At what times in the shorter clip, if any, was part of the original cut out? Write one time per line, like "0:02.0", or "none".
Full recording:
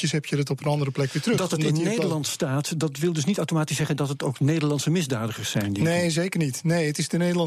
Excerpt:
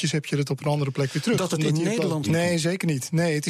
0:02.2